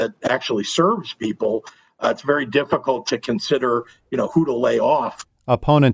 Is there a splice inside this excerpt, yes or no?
no